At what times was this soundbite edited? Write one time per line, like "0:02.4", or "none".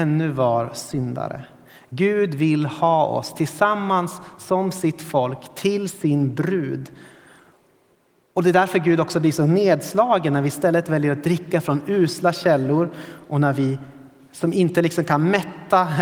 none